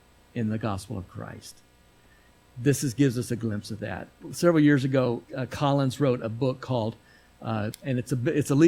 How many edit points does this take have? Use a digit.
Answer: 2